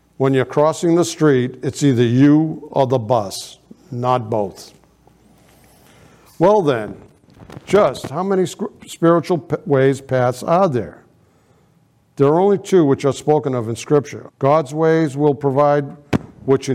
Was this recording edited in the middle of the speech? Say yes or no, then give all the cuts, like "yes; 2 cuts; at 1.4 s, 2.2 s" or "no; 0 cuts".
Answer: yes; 1 cut; at 14.3 s